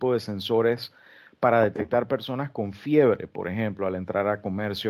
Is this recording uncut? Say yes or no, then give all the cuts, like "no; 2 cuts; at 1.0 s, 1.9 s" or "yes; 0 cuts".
yes; 0 cuts